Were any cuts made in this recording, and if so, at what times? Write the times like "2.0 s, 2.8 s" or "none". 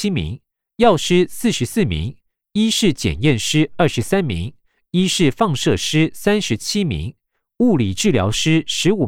none